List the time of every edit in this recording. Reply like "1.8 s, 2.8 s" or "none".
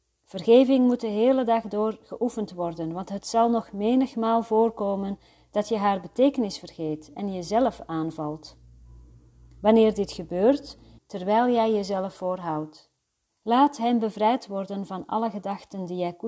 11.0 s, 13.3 s

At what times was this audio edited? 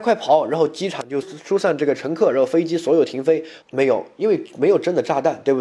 1.2 s, 3.6 s

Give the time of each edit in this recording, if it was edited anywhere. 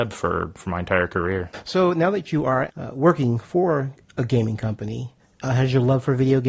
2.7 s, 5.4 s

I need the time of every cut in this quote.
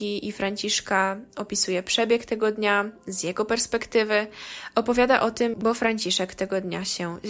5.5 s

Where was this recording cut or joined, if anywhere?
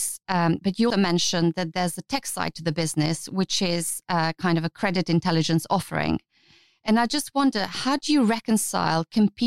0.9 s

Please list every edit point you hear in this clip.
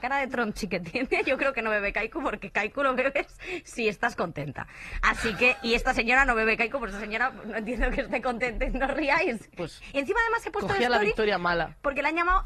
9.6 s

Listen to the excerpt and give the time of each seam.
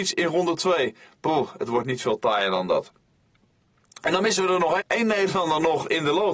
4.8 s

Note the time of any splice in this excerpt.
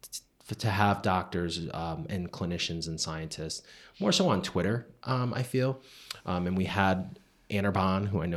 none

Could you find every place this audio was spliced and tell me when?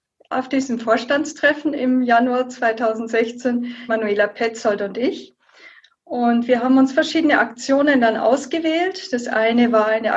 3.9 s

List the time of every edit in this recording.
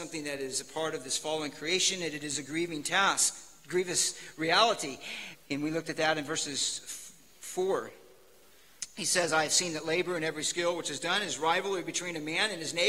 5.3 s

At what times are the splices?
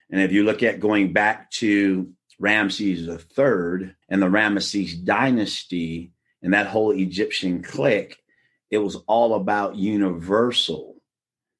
2.3 s, 4.0 s

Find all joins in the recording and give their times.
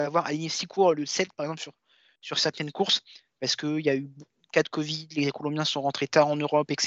none

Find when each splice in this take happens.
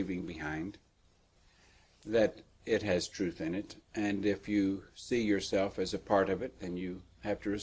none

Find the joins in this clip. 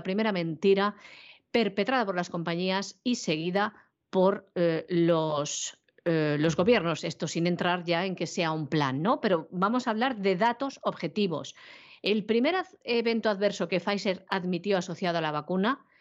none

